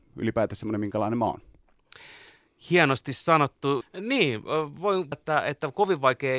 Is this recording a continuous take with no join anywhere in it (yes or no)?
no